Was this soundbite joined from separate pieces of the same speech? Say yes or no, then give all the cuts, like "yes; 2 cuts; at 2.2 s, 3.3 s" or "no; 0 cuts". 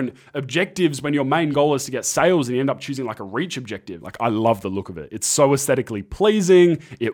yes; 1 cut; at 4.0 s